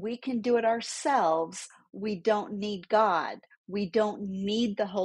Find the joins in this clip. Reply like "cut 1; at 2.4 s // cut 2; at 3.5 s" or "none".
none